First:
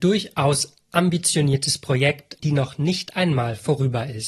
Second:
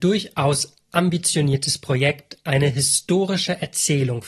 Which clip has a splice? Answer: first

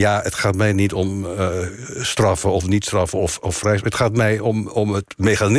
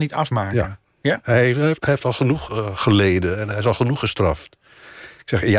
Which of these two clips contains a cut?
second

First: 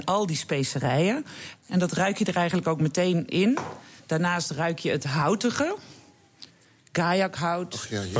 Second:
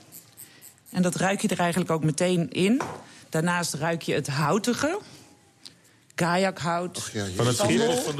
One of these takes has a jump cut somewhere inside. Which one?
first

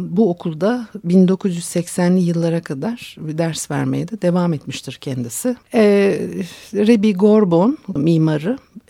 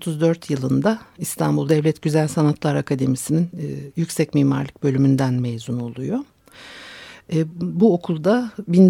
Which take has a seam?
first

